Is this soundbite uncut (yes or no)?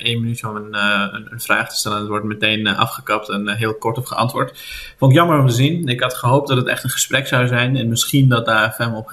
yes